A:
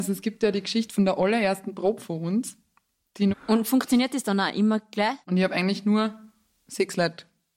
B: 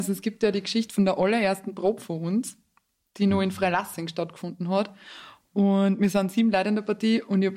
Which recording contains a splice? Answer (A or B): A